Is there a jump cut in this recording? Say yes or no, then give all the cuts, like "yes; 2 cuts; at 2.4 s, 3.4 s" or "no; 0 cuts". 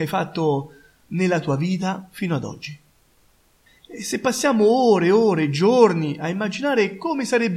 yes; 1 cut; at 3.7 s